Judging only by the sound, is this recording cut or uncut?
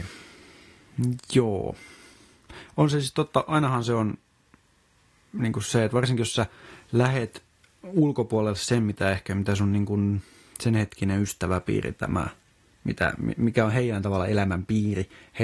uncut